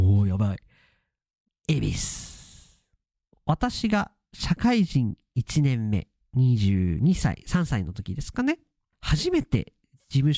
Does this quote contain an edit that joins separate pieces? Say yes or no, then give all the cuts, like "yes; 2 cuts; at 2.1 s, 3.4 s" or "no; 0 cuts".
yes; 1 cut; at 1.5 s